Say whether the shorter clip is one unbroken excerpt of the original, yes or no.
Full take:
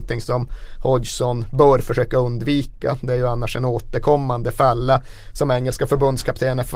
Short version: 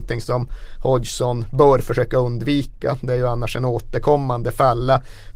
yes